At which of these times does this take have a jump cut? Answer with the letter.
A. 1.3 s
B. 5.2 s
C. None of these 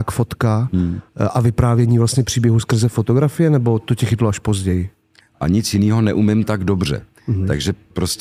B